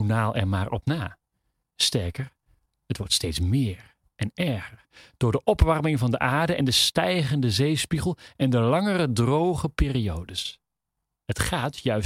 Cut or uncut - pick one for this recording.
uncut